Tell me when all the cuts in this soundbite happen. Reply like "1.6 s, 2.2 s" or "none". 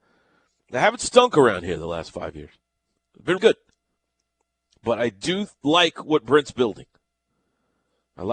3.4 s